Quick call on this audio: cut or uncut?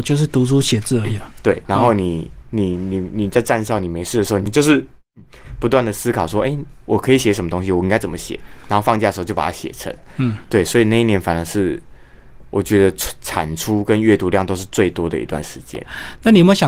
uncut